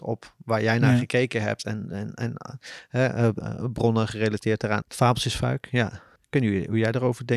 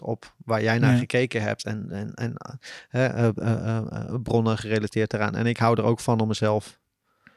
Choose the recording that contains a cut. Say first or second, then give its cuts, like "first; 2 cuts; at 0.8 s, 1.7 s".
first; 3 cuts; at 3.4 s, 4.8 s, 6.2 s